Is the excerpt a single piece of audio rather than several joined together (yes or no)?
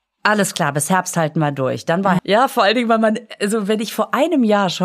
no